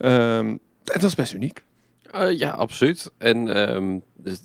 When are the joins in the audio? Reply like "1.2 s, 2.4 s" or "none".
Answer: none